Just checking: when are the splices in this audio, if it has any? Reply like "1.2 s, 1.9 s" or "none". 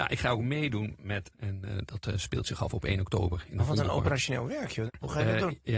1.3 s, 4.9 s